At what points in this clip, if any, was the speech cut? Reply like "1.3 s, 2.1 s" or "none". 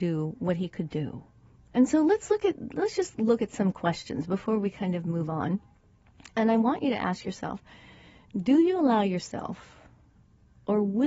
1.6 s